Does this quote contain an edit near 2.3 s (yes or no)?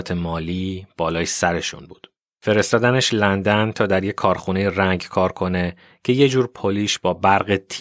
yes